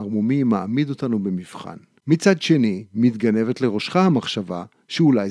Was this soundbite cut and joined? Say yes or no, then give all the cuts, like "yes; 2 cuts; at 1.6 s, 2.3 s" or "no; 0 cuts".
yes; 1 cut; at 2.0 s